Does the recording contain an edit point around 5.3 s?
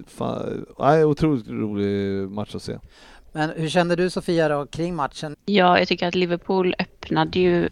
yes; 1 cut; at 5.3 s

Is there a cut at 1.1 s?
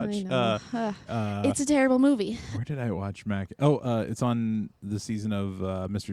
yes; 1 cut; at 1.1 s

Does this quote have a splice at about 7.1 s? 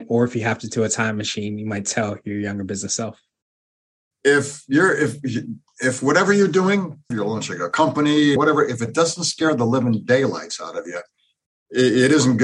yes; 2 cuts; at 7.1 s, 8.4 s

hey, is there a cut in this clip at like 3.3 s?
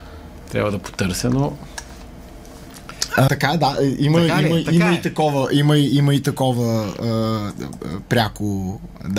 yes; 1 cut; at 3.3 s

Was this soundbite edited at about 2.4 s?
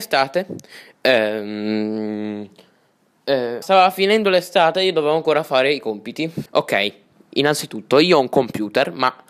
no; 2 cuts; at 3.6 s, 6.5 s

